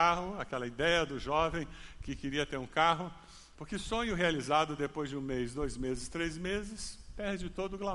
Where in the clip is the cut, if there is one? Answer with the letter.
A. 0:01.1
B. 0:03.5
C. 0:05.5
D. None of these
B